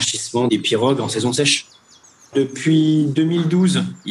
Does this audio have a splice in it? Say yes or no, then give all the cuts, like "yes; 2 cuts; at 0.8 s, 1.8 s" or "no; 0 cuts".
no; 0 cuts